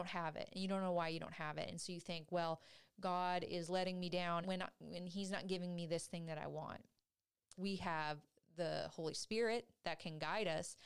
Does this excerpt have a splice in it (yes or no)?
yes